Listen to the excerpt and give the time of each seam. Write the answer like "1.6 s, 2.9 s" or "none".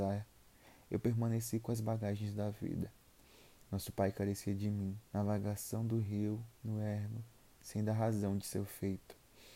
5.1 s

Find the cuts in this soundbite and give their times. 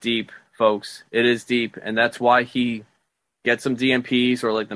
none

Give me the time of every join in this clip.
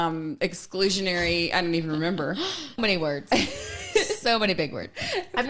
2.8 s

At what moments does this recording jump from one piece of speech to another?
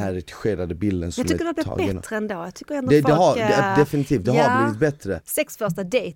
5.2 s

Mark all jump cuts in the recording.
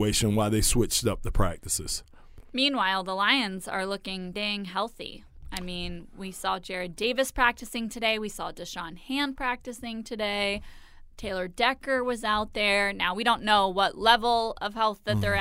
4.3 s

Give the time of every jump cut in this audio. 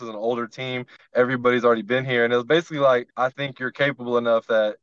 3.1 s

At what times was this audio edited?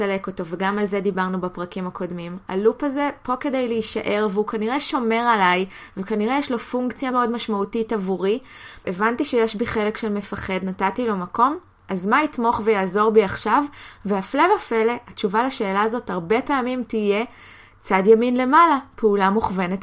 7.1 s, 8.8 s

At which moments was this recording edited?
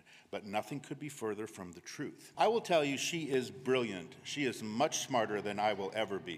2.3 s

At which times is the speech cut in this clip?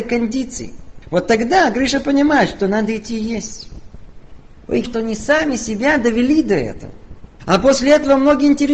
4.8 s

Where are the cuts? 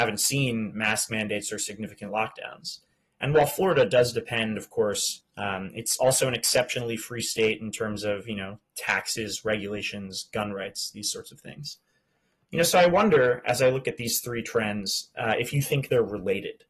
5.2 s

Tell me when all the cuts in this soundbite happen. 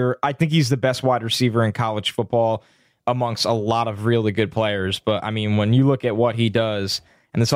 none

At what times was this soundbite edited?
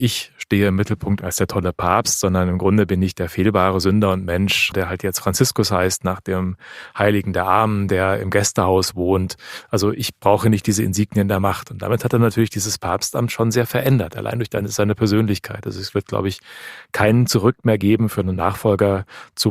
4.7 s

